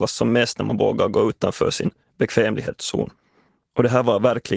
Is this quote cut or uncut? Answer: uncut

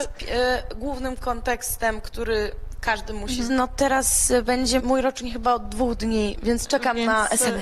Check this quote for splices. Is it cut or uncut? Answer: cut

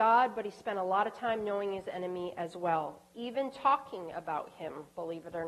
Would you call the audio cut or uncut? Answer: uncut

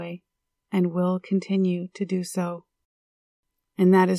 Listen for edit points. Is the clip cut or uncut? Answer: uncut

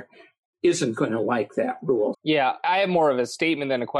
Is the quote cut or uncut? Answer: cut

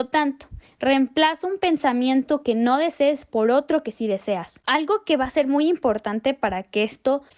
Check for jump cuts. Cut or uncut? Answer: uncut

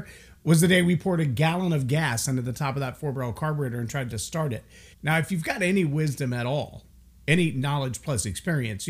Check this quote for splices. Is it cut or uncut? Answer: cut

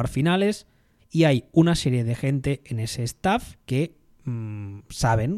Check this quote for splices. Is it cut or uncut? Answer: cut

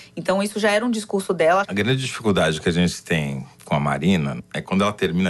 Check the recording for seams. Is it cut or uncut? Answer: cut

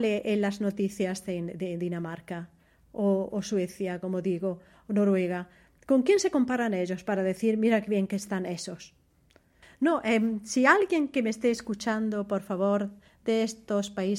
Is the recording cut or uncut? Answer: uncut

